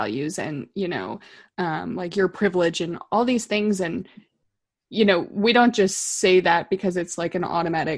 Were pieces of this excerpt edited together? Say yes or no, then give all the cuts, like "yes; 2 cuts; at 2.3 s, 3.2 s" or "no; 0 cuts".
no; 0 cuts